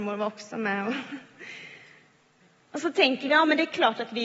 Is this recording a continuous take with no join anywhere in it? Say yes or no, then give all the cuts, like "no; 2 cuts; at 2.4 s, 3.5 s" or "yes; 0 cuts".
yes; 0 cuts